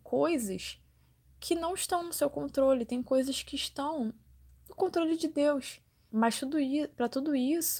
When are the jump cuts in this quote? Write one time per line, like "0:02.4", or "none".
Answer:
0:06.1